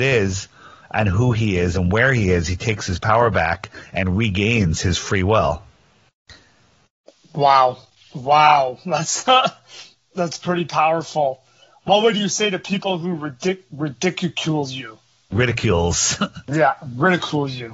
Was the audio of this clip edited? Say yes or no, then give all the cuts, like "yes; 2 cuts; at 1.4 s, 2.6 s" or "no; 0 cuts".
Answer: no; 0 cuts